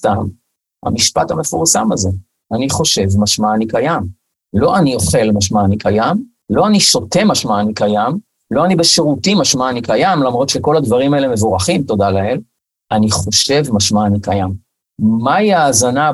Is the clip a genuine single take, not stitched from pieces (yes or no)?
no